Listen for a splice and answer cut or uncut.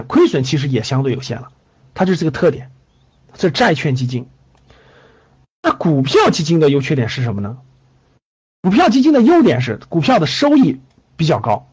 uncut